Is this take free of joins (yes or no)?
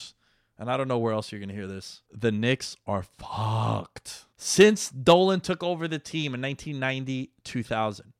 no